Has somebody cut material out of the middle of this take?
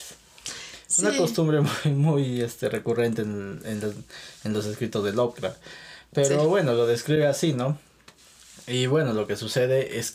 no; 0 cuts

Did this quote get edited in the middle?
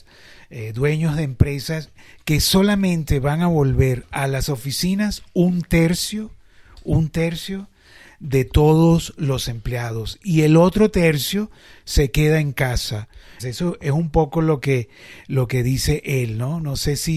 yes; 1 cut; at 13.4 s

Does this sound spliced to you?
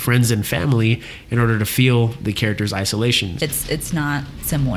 yes; 1 cut; at 3.4 s

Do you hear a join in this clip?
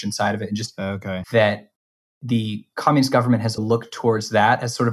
yes; 2 cuts; at 1.2 s, 3.6 s

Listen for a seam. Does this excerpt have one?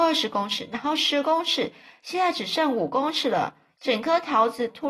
yes; 1 cut; at 3.7 s

